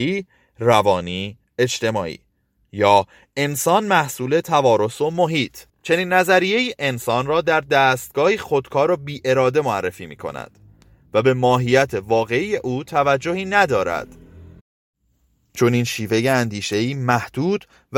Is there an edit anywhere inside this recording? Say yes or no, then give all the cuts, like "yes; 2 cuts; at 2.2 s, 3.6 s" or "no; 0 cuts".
yes; 1 cut; at 5.7 s